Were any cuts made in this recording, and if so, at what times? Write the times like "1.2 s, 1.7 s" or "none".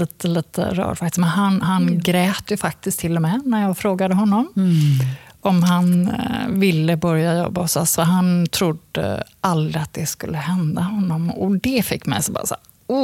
none